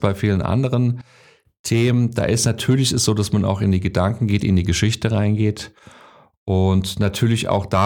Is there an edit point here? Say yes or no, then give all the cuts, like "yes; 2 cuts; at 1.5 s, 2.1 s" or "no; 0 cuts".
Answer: no; 0 cuts